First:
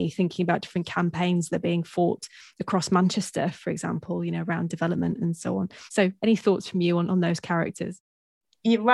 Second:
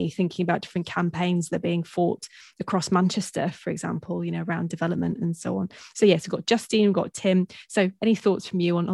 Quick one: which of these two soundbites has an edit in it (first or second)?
first